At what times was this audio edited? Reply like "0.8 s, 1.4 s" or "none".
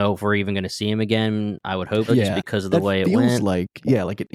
2.1 s